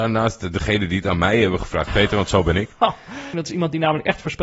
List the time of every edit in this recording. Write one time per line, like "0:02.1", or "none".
0:01.9
0:03.3